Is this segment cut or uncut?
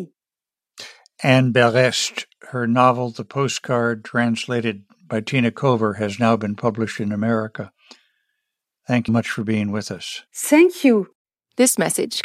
cut